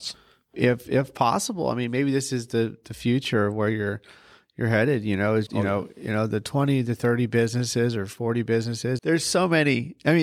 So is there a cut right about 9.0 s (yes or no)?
yes